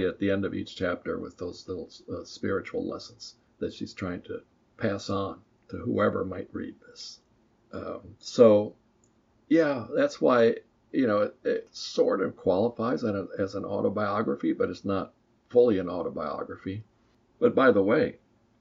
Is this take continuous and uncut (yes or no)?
yes